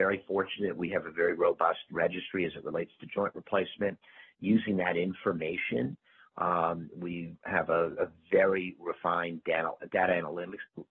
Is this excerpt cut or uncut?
uncut